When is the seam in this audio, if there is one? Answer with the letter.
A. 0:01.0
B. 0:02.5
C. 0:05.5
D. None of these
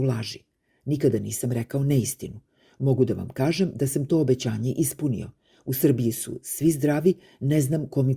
D